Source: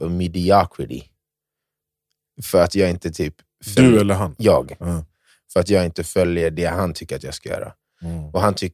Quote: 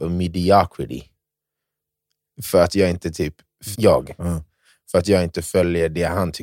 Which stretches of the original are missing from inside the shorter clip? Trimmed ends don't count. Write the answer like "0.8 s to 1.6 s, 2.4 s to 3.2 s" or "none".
3.7 s to 4.4 s